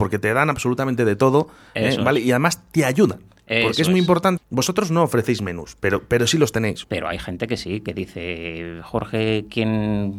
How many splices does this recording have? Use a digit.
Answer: 2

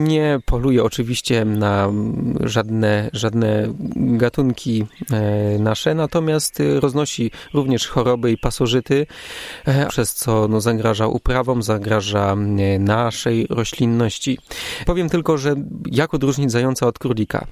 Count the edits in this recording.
2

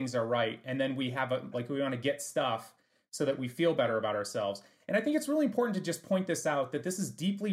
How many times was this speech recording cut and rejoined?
1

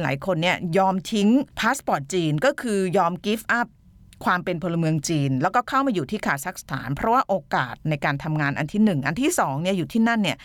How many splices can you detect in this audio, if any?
0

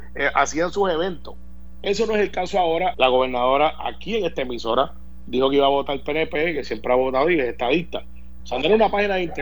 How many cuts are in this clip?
2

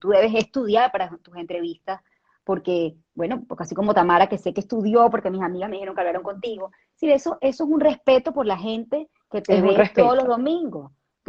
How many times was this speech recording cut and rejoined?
0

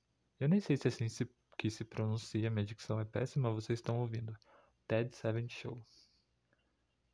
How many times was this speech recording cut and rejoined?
0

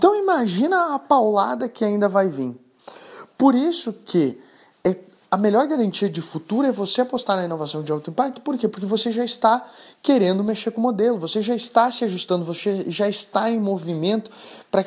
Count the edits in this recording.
0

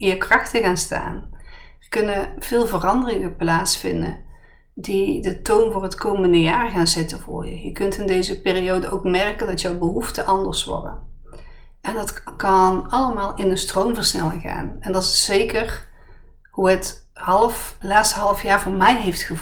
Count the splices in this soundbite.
1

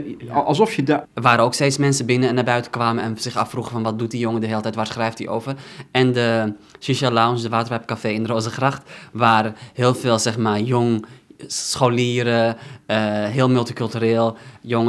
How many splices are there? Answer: 1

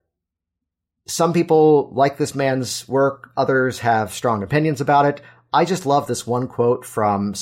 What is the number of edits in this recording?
0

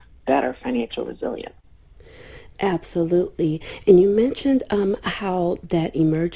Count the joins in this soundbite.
0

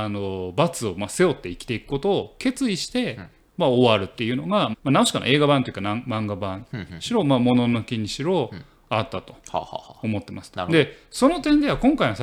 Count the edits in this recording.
1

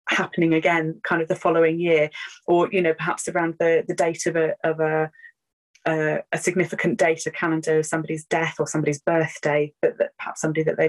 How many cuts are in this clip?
0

